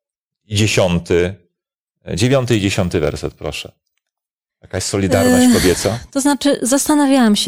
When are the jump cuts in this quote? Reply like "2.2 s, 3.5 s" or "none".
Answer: 4.5 s